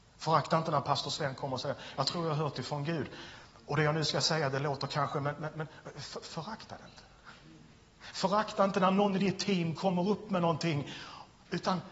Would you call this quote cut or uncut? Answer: uncut